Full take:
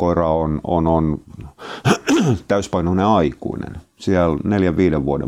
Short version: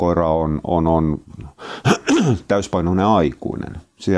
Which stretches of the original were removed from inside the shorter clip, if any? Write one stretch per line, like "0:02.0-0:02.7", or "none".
none